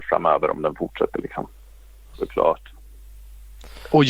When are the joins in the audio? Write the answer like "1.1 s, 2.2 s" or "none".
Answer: 2.1 s